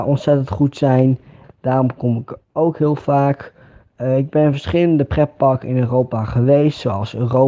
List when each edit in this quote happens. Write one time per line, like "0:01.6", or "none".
0:01.4